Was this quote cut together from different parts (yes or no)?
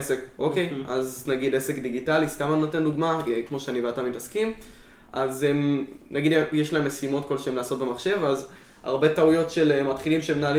no